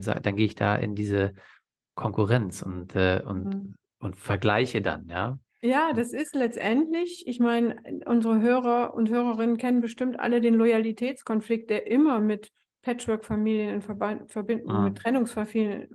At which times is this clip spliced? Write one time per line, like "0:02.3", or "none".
none

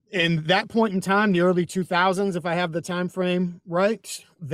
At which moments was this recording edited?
none

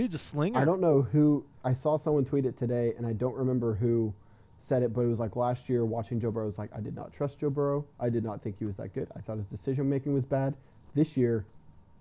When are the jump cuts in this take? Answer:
none

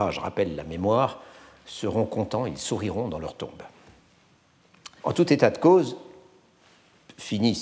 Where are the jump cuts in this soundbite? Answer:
0:05.0

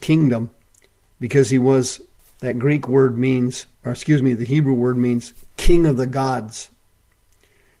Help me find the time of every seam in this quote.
0:02.2
0:03.7

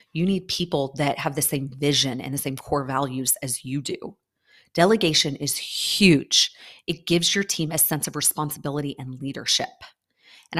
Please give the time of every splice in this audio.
none

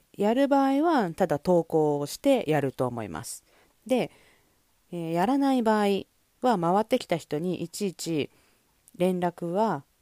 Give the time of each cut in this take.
0:03.7

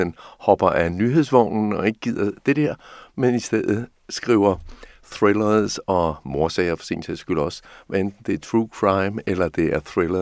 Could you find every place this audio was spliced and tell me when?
none

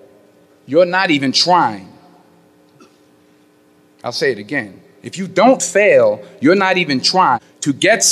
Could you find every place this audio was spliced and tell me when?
none

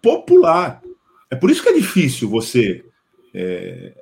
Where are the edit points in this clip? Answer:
0:01.2

